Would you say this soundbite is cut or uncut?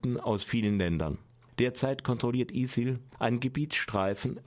uncut